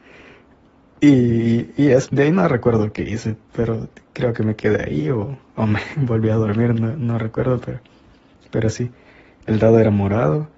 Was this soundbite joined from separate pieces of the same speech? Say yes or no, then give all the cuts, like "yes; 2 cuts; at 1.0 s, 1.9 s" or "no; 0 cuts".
yes; 1 cut; at 2.1 s